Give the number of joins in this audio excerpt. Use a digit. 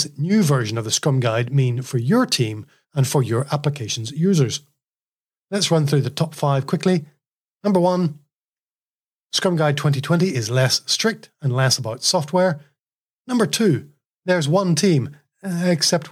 2